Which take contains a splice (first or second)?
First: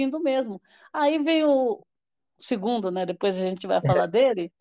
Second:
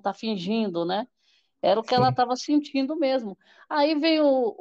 first